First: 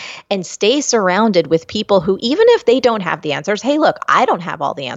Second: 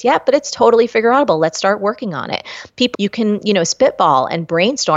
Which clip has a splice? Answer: second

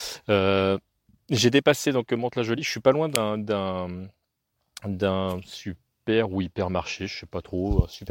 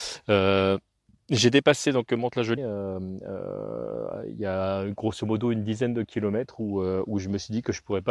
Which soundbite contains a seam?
second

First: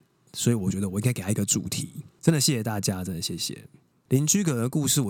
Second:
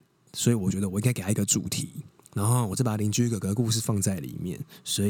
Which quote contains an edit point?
first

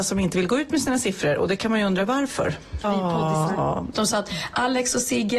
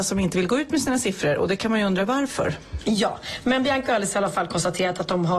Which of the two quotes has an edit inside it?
first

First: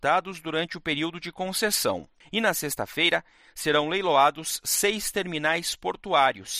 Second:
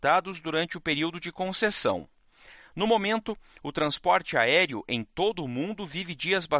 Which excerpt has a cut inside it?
first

